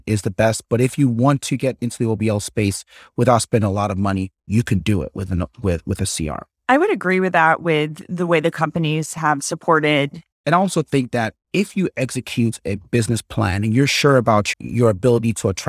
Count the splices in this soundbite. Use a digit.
2